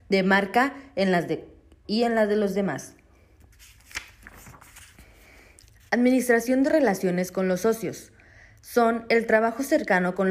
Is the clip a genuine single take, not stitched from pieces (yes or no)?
yes